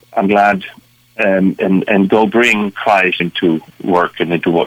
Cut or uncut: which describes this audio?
cut